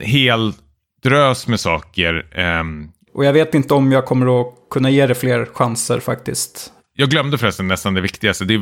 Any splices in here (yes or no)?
yes